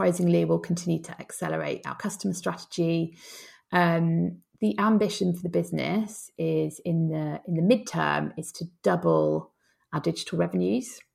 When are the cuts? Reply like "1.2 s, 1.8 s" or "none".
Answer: none